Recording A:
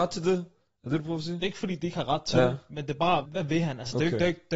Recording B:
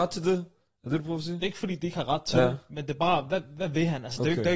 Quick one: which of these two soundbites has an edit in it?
A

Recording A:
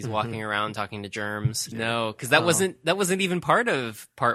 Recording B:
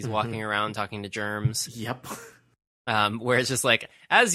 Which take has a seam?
A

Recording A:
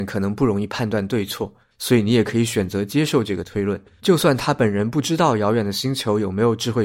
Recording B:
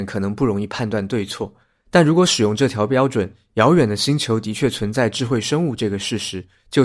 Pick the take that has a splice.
A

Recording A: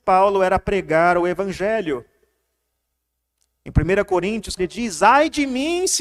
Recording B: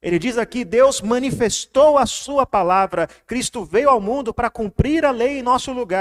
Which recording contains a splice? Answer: A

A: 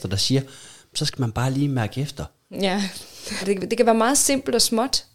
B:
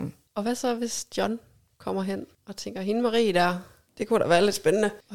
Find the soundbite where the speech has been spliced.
A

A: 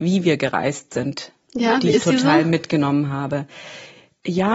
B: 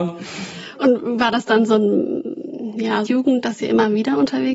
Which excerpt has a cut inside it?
B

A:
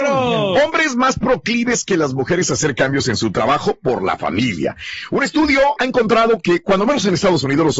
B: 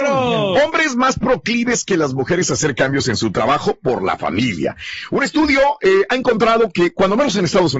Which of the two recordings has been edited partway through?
A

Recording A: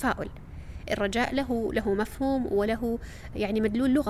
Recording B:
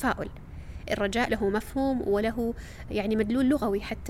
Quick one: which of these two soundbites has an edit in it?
B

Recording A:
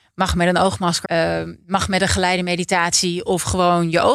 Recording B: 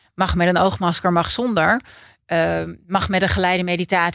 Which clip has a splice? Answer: A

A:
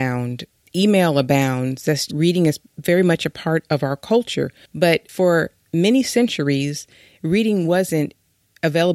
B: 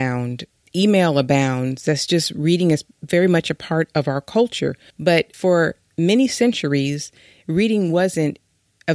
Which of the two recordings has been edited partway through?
A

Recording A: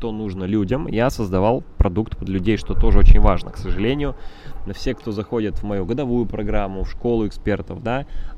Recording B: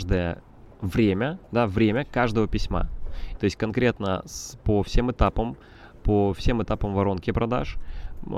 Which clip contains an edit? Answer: B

